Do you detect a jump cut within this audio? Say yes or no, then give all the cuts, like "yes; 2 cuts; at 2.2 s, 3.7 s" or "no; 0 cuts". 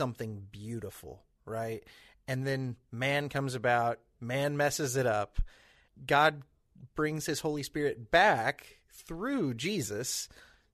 yes; 2 cuts; at 4.2 s, 5.9 s